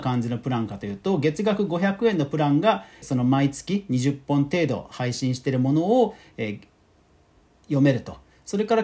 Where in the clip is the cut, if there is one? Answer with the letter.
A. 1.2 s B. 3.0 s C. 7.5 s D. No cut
B